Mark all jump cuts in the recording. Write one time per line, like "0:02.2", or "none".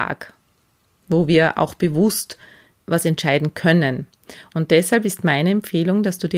0:04.5